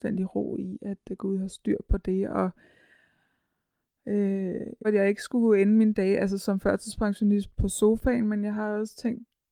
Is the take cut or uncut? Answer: cut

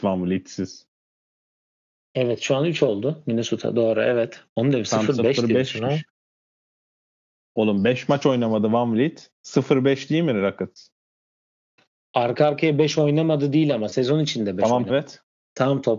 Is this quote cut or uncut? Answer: cut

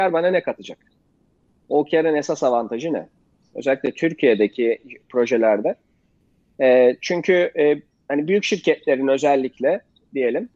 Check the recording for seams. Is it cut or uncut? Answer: cut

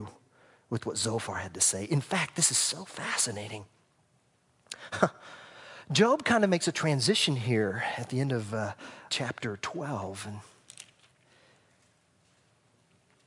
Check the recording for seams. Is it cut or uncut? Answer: cut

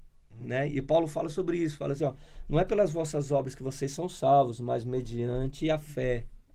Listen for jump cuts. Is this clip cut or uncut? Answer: uncut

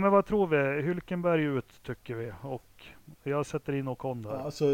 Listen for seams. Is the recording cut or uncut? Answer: uncut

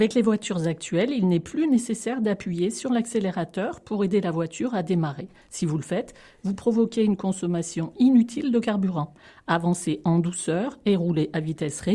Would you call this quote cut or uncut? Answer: uncut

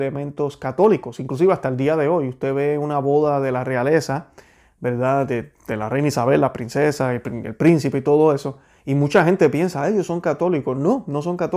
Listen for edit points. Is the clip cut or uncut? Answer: uncut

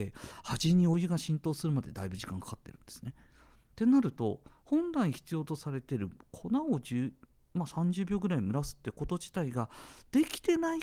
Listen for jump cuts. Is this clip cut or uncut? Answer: cut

